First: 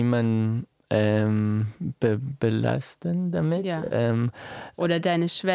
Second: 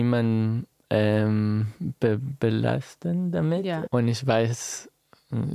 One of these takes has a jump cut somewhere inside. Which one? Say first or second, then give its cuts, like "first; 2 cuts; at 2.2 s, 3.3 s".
second; 1 cut; at 3.9 s